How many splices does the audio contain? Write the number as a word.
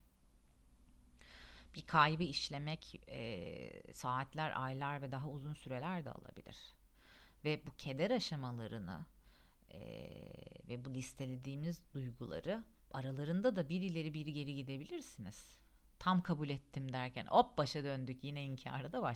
one